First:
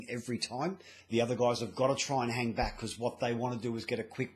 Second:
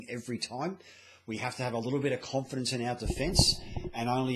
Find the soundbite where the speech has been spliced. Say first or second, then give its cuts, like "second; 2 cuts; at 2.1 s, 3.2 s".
first; 1 cut; at 1.0 s